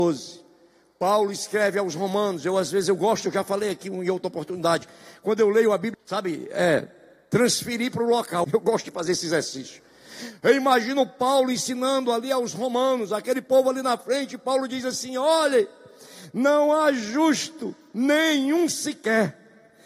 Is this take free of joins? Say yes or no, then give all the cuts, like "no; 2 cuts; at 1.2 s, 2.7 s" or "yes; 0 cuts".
no; 2 cuts; at 5.9 s, 8.4 s